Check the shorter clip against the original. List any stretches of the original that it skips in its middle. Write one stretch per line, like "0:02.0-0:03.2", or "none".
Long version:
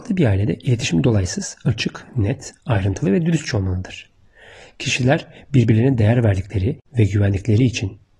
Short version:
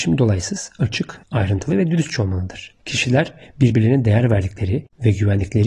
0:02.1-0:02.6
0:04.1-0:04.7